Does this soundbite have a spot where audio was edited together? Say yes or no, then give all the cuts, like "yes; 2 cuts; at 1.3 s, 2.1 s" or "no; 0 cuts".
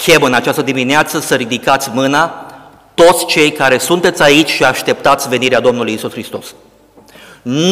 no; 0 cuts